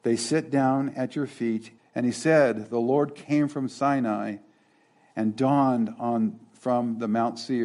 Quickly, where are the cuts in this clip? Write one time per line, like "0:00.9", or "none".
0:01.8